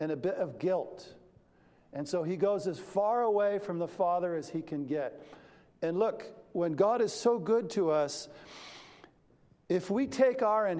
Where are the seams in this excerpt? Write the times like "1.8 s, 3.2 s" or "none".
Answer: none

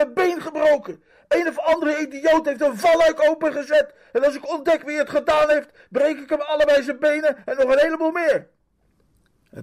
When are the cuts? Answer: none

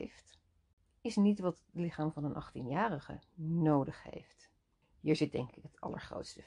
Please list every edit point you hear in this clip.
4.8 s

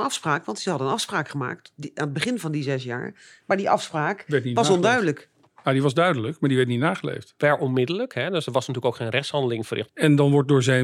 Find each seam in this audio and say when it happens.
7.4 s, 9.9 s

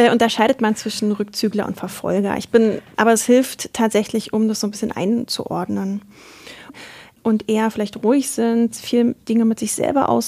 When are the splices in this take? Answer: 2.9 s, 6.7 s

